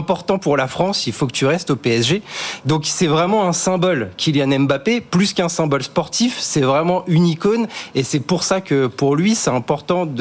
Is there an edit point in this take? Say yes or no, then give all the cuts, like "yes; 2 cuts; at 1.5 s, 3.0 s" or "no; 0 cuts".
no; 0 cuts